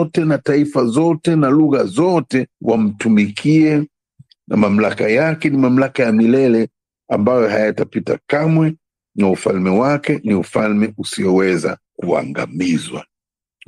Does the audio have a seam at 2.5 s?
yes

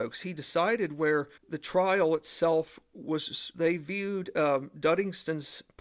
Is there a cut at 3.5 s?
yes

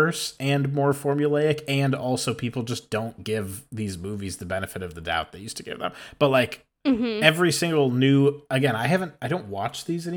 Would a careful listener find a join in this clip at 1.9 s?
no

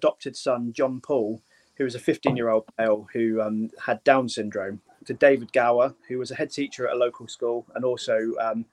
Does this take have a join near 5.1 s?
yes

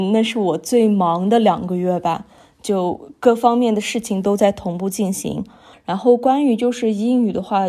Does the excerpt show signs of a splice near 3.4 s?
no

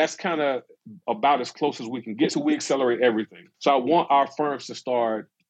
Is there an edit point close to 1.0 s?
no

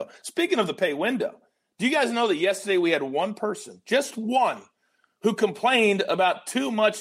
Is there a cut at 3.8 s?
no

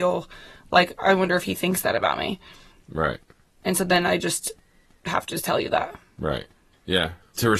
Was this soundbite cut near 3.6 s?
no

